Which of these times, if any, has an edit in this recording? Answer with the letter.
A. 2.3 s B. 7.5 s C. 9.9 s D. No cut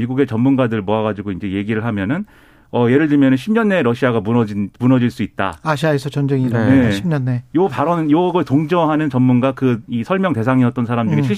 C